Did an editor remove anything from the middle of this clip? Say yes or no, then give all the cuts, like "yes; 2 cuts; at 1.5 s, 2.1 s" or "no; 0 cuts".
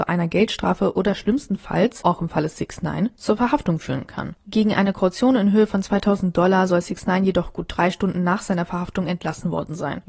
yes; 1 cut; at 2.0 s